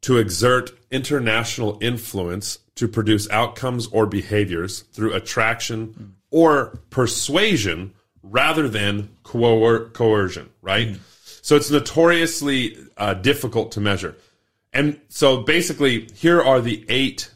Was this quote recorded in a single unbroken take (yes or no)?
yes